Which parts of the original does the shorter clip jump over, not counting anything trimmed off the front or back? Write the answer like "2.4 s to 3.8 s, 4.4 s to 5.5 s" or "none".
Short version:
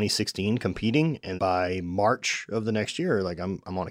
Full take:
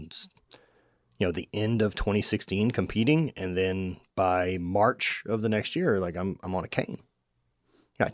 3.5 s to 4.1 s